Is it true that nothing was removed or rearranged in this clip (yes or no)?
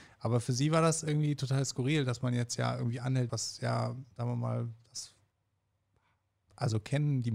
no